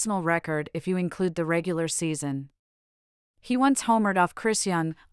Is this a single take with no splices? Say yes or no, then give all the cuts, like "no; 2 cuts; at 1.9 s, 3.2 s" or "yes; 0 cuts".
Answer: yes; 0 cuts